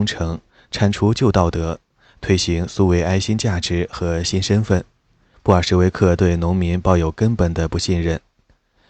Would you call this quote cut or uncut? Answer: cut